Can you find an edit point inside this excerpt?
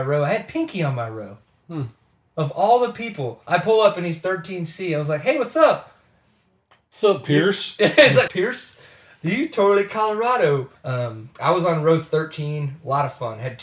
yes; 2 cuts; at 8.3 s, 10.8 s

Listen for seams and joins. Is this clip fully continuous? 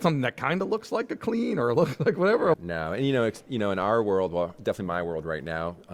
no; 1 cut; at 2.5 s

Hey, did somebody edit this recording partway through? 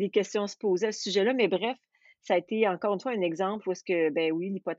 no; 0 cuts

